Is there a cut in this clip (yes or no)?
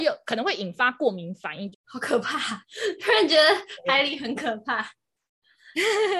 yes